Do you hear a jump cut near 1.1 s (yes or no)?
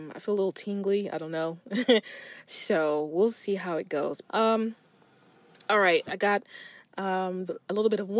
no